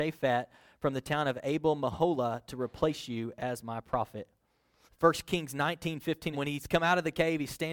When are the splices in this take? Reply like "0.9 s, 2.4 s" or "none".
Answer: 4.9 s, 6.3 s